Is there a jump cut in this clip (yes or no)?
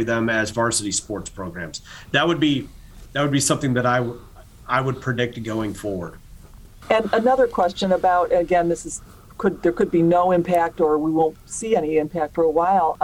yes